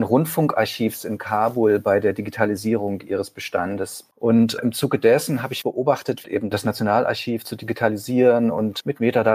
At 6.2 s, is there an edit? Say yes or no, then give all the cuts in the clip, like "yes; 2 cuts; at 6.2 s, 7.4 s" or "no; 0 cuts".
yes; 2 cuts; at 4.1 s, 6.2 s